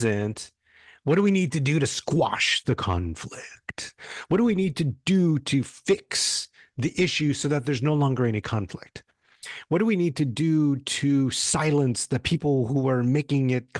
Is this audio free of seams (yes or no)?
yes